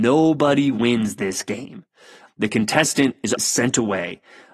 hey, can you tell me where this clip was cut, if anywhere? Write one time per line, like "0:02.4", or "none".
0:02.3
0:03.4